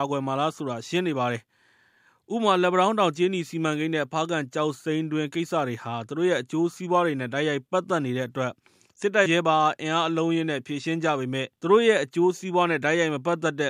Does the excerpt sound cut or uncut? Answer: cut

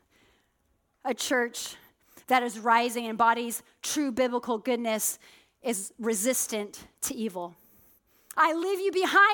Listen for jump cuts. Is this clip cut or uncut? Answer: cut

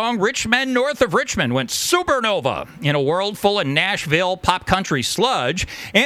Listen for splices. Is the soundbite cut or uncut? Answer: uncut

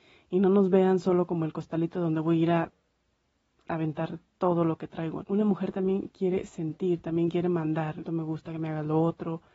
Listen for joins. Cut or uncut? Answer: cut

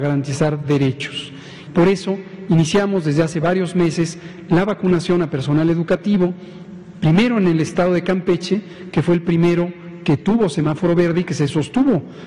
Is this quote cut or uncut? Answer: cut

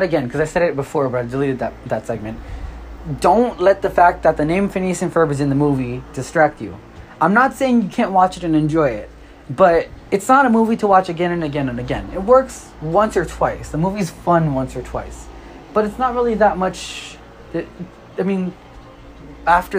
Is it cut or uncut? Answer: uncut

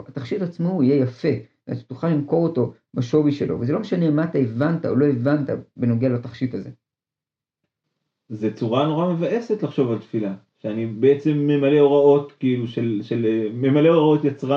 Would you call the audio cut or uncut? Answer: uncut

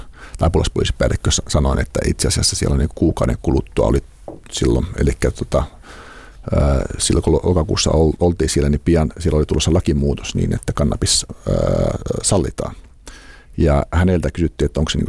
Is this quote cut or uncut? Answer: uncut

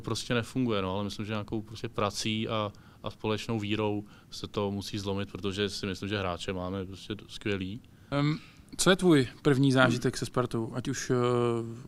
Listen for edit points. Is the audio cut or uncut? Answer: cut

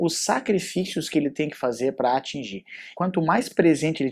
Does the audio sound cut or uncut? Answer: cut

